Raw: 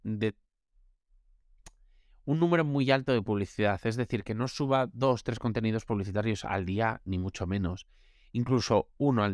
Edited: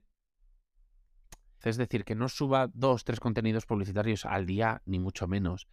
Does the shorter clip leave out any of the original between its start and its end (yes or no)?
yes